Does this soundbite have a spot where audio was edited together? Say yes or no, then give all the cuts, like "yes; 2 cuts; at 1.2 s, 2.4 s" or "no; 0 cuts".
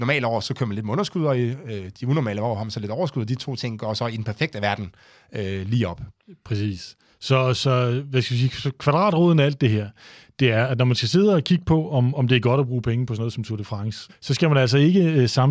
yes; 1 cut; at 14.1 s